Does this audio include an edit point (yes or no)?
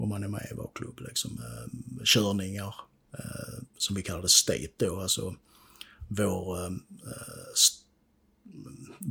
yes